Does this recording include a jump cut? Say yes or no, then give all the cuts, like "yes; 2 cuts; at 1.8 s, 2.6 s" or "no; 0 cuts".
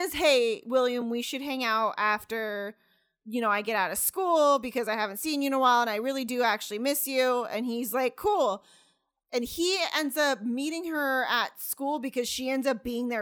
no; 0 cuts